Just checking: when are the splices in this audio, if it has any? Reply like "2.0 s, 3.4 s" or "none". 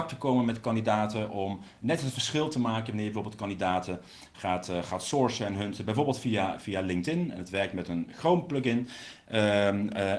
none